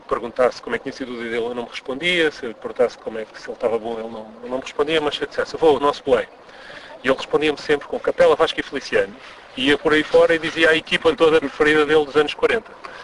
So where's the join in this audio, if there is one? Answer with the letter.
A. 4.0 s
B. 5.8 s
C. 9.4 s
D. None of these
B